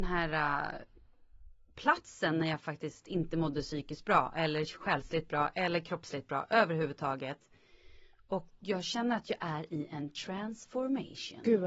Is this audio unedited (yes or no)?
yes